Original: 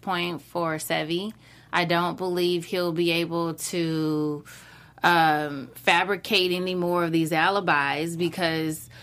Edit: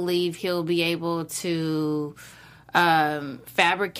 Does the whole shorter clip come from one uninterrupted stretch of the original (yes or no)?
yes